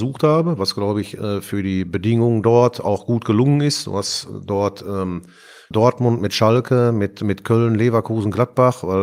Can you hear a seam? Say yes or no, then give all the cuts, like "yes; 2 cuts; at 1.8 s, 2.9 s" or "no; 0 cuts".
yes; 1 cut; at 5.7 s